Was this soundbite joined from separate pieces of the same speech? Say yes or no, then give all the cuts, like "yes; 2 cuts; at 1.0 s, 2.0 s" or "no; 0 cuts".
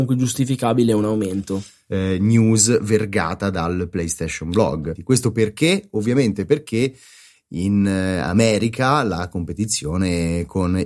yes; 2 cuts; at 1.9 s, 5.0 s